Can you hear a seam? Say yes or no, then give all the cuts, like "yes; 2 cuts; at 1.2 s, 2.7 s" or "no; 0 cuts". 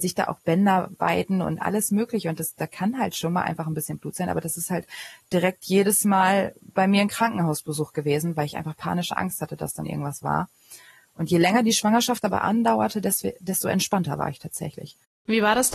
no; 0 cuts